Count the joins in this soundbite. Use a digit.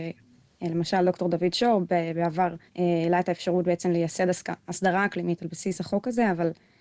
1